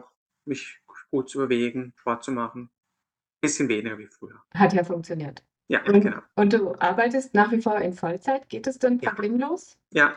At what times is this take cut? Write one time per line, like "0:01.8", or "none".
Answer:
0:04.4